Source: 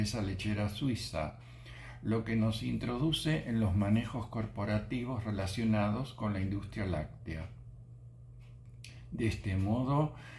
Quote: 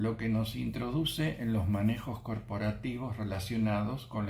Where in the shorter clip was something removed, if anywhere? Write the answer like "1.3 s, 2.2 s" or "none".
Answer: none

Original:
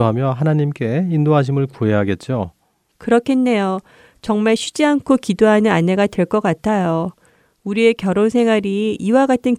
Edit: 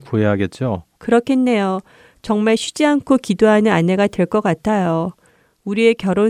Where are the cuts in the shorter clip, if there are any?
0.9 s

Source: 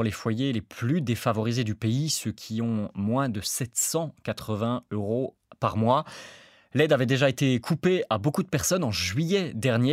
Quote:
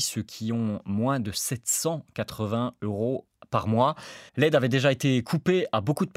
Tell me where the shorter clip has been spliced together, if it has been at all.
4.3 s

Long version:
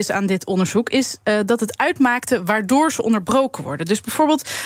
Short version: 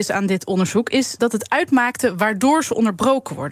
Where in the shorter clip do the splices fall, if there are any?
1.2 s

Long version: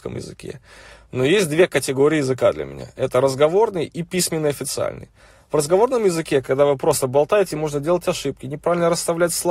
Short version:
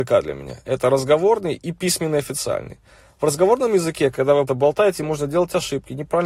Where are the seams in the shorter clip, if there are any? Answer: 4.5 s

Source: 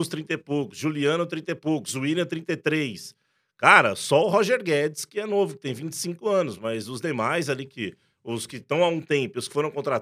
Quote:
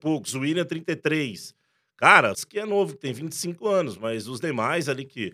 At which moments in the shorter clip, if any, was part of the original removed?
2.3 s

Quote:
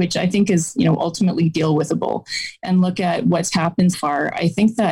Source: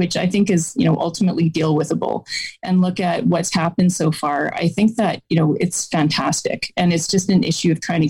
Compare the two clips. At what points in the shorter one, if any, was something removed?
3.9 s

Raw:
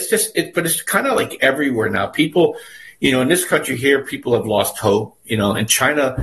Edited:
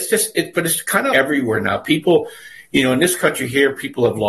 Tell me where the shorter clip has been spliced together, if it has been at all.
1.1 s

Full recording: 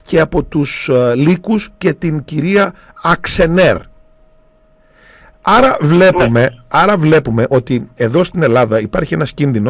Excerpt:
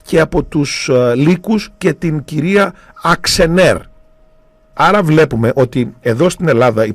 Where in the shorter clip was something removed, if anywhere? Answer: 4.7 s

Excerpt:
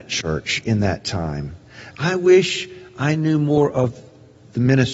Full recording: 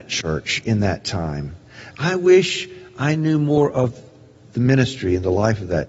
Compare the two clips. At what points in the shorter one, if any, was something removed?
none

